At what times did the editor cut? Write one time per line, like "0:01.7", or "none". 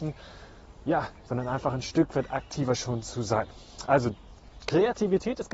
0:01.3